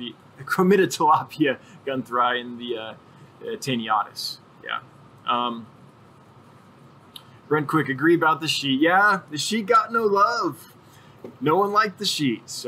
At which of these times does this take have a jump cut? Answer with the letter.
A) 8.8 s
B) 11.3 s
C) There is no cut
C